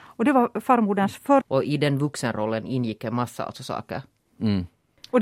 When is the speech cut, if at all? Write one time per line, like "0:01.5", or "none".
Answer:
0:01.4